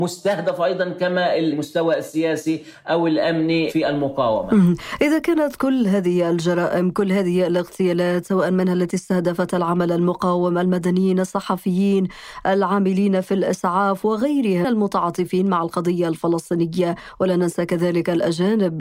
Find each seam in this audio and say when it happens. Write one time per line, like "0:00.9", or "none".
0:14.6